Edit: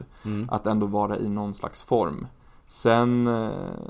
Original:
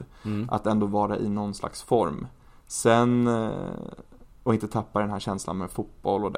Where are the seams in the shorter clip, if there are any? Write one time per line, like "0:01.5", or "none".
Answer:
none